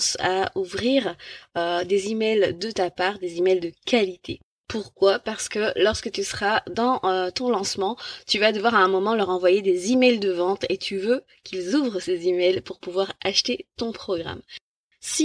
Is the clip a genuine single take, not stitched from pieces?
yes; 0 cuts

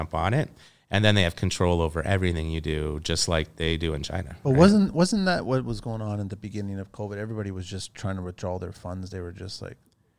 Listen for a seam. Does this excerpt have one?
no; 0 cuts

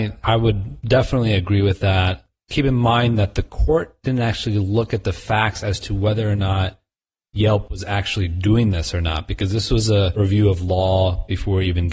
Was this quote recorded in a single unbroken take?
yes; 0 cuts

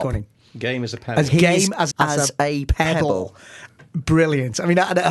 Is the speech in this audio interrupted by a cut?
yes; 1 cut; at 1.9 s

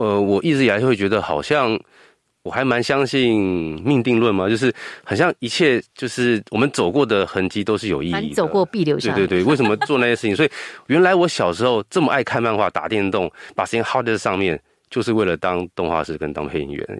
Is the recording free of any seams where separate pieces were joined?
yes; 0 cuts

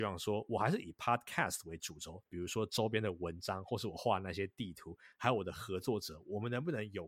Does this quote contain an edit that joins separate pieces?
yes; 1 cut; at 2.3 s

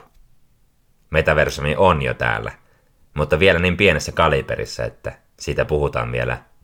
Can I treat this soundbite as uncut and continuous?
no; 1 cut; at 1.0 s

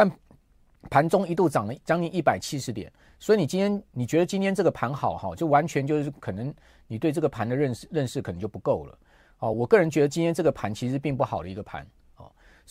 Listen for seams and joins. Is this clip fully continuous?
yes; 0 cuts

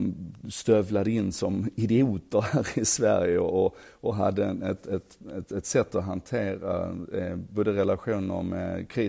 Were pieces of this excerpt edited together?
no; 0 cuts

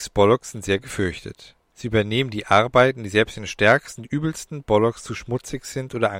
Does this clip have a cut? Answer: no; 0 cuts

